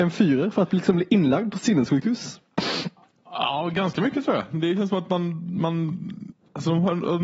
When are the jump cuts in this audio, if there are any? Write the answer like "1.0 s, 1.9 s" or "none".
none